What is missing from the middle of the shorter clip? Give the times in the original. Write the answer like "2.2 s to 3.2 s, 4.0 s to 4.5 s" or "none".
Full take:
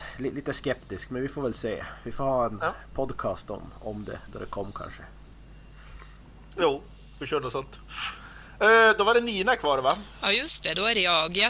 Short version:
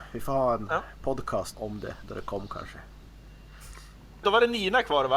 3.5 s to 3.8 s, 6.5 s to 9.0 s